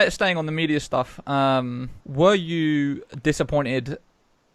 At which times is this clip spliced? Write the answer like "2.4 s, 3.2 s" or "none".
2.0 s